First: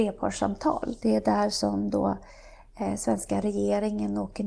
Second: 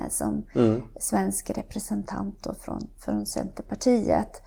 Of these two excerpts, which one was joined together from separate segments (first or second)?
first